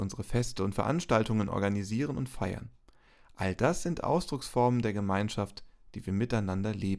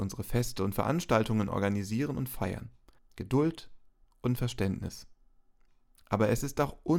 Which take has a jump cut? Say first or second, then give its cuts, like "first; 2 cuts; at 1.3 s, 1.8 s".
second; 1 cut; at 3.0 s